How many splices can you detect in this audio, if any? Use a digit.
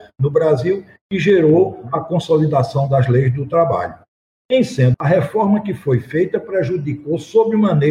1